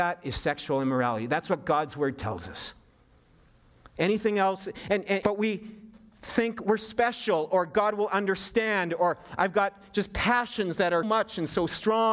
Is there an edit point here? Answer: yes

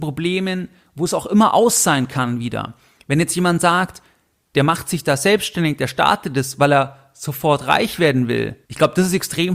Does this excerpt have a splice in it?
yes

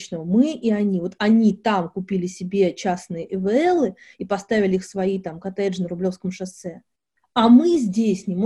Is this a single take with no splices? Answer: yes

